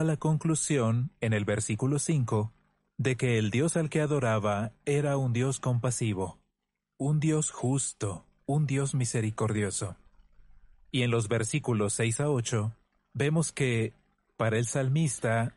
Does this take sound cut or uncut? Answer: uncut